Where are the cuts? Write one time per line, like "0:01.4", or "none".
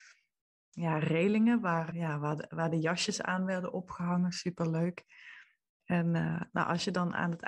0:01.9